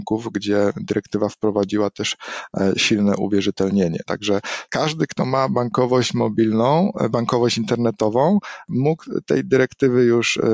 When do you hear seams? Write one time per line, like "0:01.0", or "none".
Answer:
none